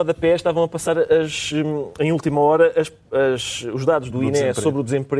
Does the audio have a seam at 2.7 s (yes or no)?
no